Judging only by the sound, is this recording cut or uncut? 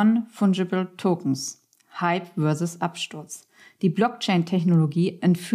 uncut